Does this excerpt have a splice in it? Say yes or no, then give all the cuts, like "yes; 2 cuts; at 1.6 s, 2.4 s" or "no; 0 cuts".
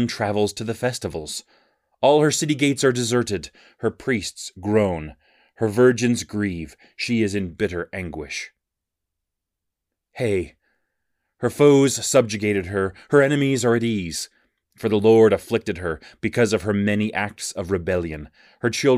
no; 0 cuts